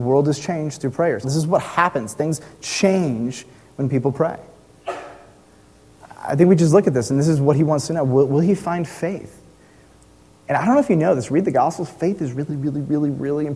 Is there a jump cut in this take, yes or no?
yes